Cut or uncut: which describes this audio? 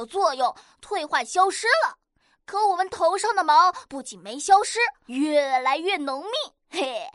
cut